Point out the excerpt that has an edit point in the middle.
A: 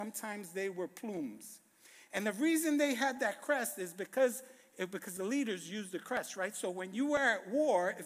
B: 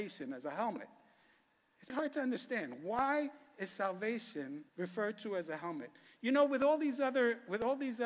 B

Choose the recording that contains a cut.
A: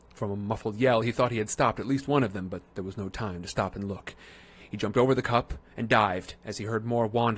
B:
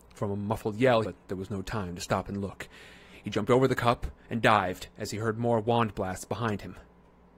B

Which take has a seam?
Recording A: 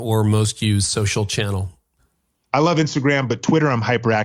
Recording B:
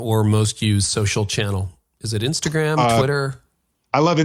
A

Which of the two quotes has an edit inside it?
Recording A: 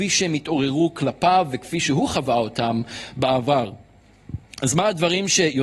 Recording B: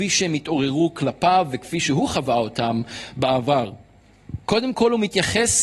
B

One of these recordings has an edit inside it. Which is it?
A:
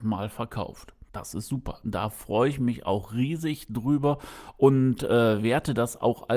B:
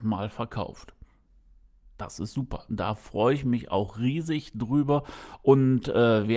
A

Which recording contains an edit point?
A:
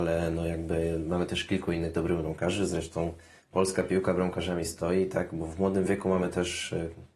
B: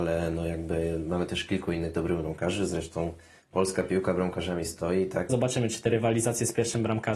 B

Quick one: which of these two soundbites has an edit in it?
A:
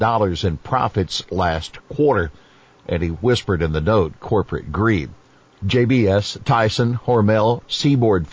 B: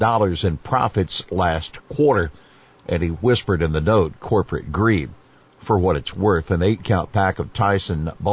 A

